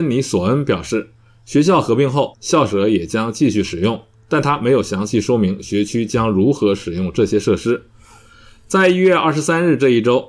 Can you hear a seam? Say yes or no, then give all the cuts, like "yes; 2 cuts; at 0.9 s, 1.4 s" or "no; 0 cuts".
yes; 1 cut; at 2.3 s